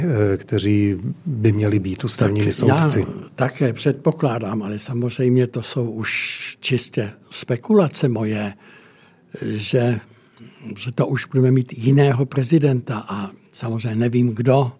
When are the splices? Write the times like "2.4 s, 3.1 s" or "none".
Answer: none